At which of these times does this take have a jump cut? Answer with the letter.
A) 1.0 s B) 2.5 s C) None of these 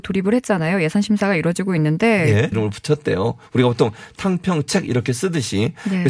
B